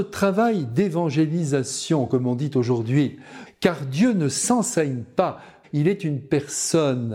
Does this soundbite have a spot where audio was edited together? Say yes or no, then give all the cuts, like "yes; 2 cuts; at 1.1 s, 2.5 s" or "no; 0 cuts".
yes; 2 cuts; at 3.5 s, 5.6 s